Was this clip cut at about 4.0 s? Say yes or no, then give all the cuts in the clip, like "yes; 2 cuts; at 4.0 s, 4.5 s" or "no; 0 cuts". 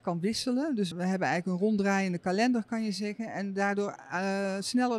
no; 1 cut; at 0.9 s